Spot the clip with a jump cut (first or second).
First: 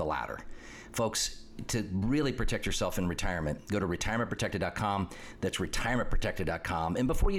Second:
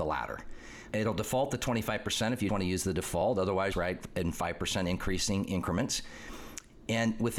second